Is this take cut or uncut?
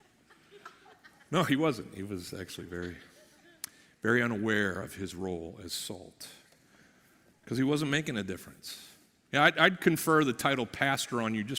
uncut